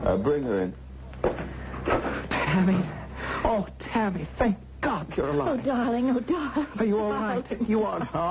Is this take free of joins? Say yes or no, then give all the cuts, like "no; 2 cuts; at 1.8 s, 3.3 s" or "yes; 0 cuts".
yes; 0 cuts